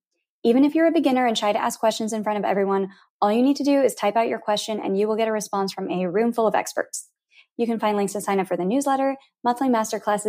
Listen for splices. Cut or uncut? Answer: uncut